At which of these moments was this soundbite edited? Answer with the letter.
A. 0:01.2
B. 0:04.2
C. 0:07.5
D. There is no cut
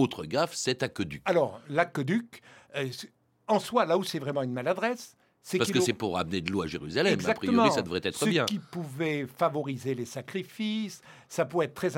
D